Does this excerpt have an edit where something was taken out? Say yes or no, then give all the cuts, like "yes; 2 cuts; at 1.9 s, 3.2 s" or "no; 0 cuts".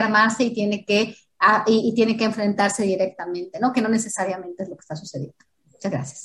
no; 0 cuts